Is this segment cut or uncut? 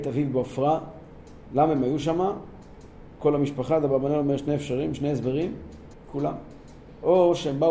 cut